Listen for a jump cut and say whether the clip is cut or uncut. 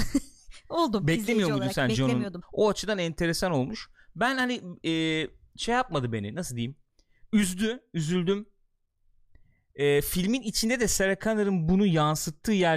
cut